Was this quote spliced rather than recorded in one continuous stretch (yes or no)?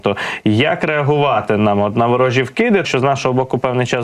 yes